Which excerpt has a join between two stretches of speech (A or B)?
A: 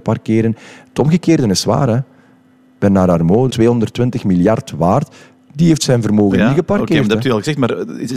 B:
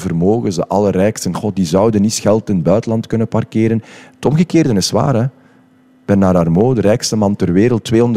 A